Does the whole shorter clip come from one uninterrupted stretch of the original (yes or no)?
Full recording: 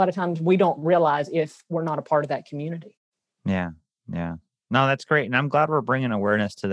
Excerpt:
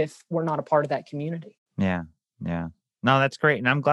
no